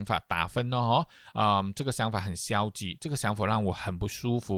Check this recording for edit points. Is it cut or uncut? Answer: uncut